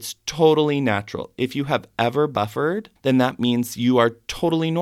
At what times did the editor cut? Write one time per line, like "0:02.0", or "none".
0:03.0